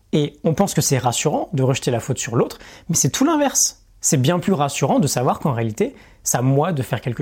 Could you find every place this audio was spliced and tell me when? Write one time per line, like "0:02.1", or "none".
none